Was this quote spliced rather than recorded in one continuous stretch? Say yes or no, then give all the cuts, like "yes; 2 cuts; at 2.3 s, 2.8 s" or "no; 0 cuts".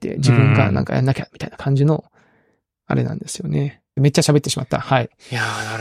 yes; 1 cut; at 4.0 s